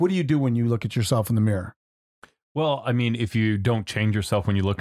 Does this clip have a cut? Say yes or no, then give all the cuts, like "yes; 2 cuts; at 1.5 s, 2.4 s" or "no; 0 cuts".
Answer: no; 0 cuts